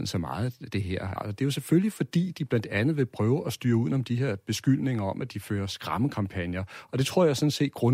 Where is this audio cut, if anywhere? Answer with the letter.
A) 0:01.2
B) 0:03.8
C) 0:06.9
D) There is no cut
A